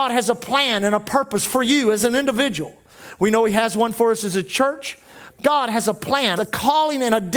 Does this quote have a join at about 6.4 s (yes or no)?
yes